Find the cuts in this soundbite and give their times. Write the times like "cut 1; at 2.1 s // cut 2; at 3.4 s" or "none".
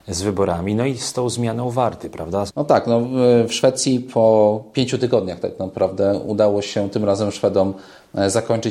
cut 1; at 2.5 s